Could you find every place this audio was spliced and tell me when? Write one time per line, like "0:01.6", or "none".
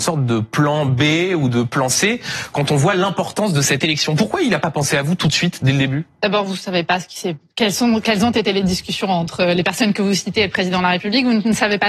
none